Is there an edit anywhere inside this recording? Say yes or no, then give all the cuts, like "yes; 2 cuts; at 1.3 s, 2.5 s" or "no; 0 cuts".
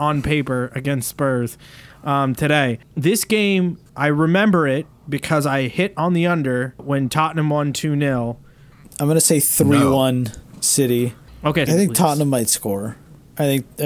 yes; 3 cuts; at 3.9 s, 8.8 s, 11.7 s